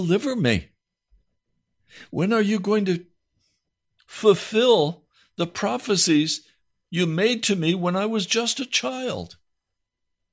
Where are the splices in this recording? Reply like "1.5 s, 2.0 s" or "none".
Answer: none